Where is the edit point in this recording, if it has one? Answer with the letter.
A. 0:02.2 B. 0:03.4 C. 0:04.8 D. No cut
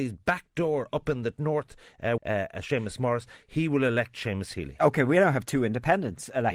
A